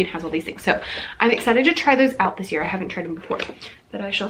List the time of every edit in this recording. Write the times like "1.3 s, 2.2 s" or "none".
none

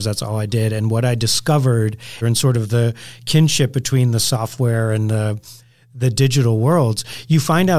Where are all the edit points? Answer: 2.2 s

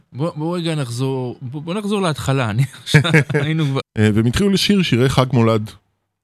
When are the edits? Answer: 3.8 s

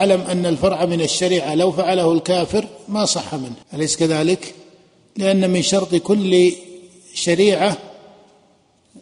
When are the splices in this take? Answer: 3.6 s

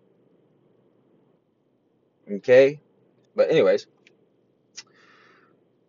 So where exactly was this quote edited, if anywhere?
3.2 s

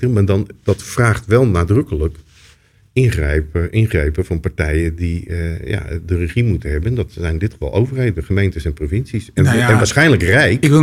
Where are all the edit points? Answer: none

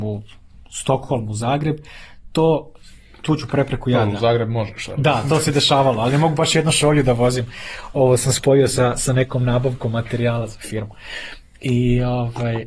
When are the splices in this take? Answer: none

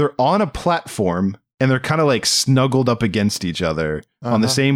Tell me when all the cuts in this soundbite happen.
none

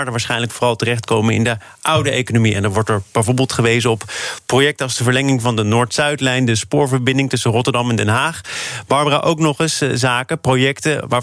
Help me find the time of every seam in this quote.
none

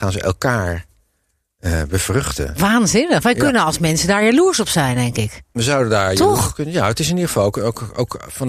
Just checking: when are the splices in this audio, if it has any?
none

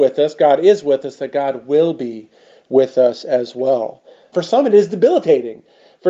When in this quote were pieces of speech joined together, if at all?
4.3 s

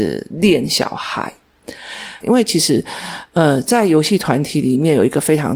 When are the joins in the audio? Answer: 2.2 s

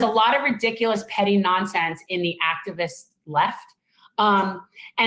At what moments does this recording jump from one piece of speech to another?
none

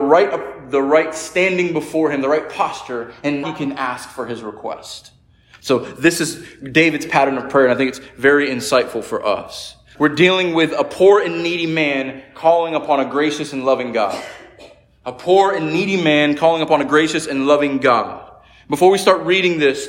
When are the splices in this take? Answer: 3.4 s, 9.9 s

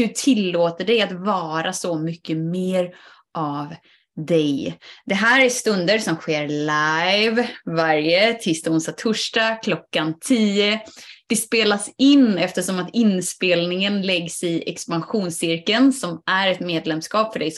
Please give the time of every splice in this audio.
none

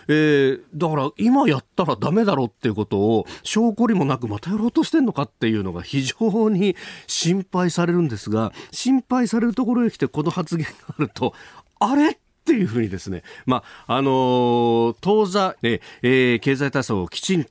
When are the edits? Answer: 15.6 s

